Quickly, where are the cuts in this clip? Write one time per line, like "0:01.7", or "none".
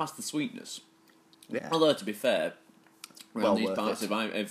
0:01.6